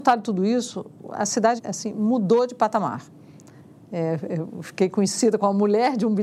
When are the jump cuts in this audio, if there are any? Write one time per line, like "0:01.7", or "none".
0:01.6